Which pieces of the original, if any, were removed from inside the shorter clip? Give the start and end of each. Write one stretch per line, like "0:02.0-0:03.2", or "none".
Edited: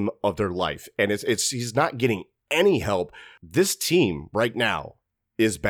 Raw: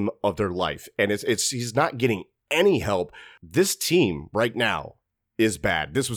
none

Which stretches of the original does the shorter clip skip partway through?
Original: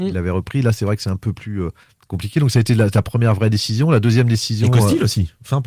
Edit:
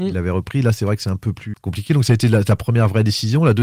0:01.5-0:02.0

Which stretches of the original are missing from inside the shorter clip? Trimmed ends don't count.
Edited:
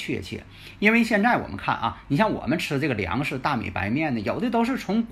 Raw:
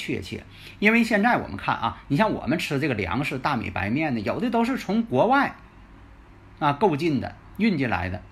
none

